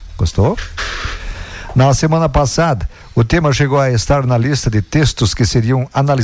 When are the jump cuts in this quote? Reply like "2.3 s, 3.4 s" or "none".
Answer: none